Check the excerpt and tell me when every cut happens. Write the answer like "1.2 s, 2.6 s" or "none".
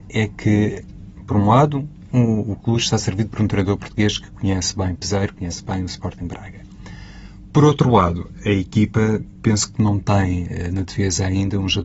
none